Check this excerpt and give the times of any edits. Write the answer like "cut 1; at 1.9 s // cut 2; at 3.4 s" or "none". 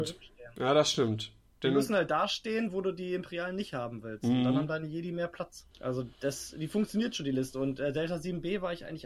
cut 1; at 5.7 s

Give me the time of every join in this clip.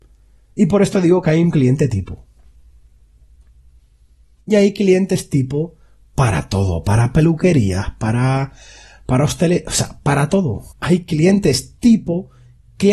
cut 1; at 10.7 s

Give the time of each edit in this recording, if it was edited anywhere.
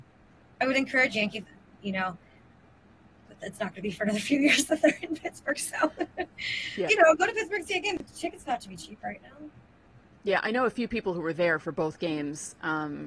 cut 1; at 6.9 s

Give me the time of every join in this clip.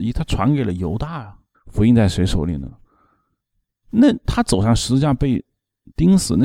cut 1; at 1.5 s // cut 2; at 3.8 s

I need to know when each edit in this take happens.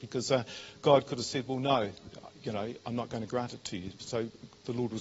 none

